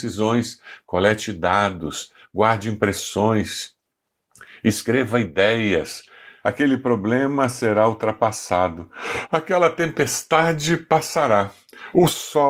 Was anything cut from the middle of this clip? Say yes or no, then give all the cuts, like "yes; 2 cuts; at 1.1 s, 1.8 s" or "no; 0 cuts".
yes; 1 cut; at 6.4 s